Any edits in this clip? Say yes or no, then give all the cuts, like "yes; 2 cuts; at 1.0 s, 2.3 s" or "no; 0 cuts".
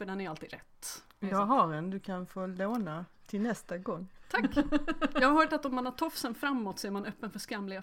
no; 0 cuts